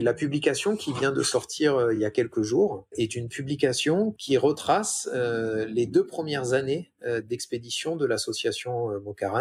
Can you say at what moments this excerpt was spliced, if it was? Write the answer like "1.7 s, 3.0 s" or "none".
none